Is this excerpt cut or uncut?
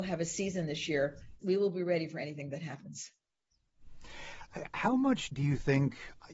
cut